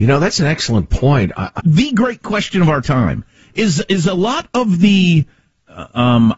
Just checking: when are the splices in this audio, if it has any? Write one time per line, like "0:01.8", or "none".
0:01.6

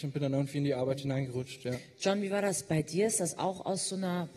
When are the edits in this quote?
none

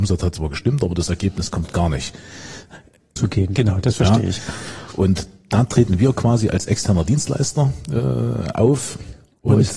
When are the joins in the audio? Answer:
0:03.2

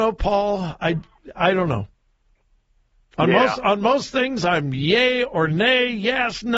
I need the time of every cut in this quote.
none

